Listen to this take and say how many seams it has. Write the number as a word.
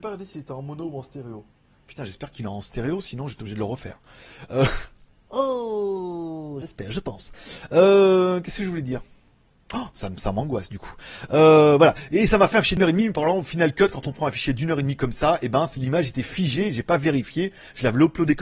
zero